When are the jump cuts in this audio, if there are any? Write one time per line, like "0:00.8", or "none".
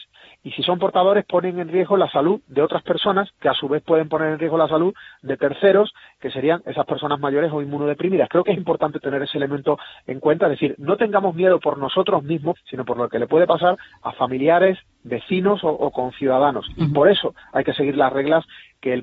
0:08.6
0:12.6